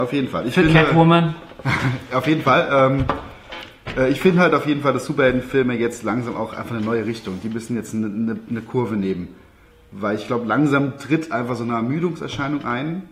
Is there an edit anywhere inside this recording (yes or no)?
no